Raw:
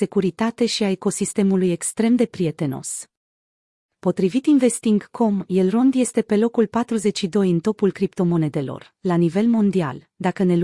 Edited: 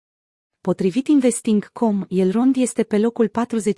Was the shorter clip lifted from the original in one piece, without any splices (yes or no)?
yes